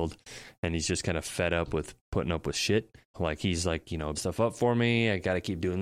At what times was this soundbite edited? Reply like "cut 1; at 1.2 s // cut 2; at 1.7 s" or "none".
cut 1; at 3.1 s // cut 2; at 4.1 s